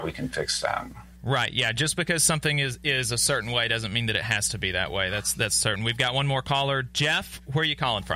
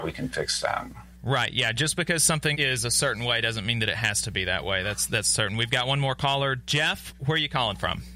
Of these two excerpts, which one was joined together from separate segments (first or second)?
second